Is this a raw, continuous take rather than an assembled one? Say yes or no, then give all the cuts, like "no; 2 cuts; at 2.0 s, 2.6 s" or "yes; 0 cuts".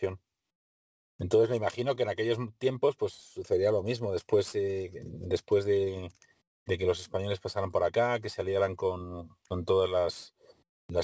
yes; 0 cuts